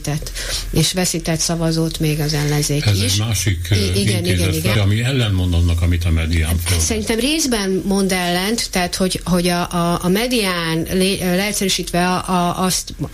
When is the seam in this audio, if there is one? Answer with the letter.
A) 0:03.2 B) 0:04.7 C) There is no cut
B